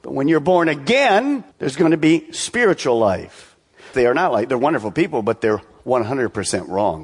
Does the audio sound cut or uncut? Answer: cut